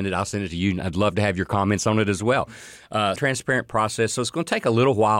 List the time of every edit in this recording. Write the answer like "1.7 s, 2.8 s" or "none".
3.2 s